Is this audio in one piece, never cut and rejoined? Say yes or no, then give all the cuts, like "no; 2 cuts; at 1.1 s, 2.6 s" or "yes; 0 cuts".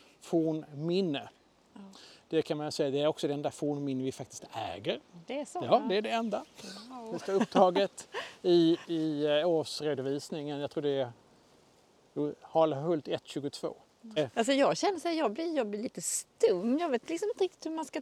no; 2 cuts; at 8.8 s, 14.2 s